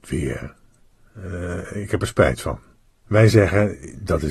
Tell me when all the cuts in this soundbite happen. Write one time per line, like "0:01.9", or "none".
0:02.9